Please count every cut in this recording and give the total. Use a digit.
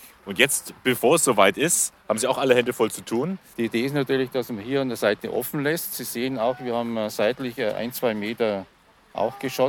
1